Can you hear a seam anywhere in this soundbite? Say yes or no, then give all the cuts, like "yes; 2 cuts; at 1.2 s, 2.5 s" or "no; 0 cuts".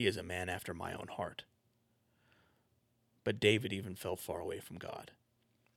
no; 0 cuts